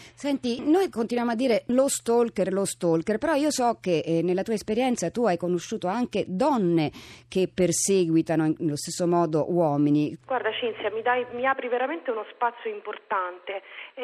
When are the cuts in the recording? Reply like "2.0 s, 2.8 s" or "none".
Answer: 10.2 s

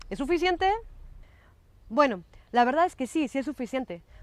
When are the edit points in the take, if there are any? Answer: none

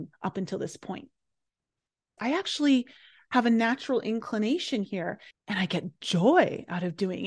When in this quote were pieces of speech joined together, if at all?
2.2 s, 5.3 s

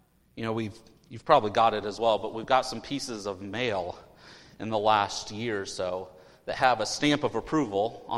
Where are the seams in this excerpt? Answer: none

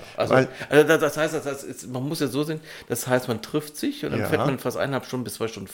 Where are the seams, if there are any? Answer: none

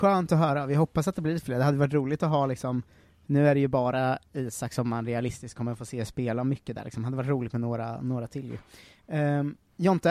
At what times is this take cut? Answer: none

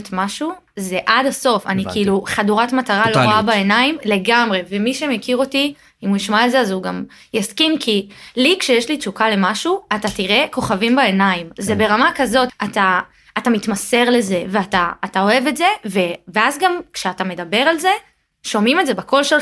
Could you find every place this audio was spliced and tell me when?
12.5 s

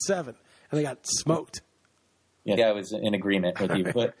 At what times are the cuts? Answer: 2.6 s

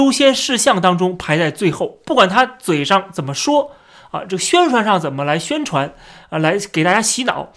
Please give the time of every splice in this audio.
none

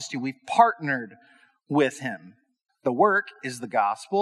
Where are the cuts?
2.7 s

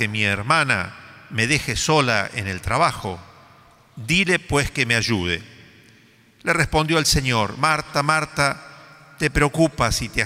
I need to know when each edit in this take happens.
none

